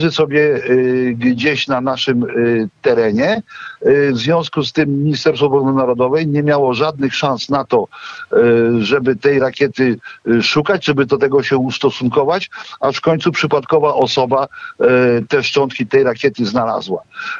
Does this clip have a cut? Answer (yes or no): no